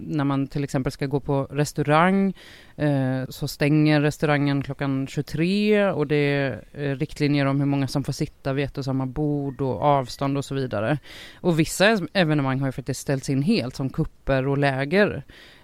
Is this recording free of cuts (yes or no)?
no